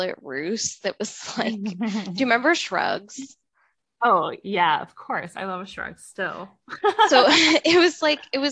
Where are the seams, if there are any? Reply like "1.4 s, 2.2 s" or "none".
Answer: none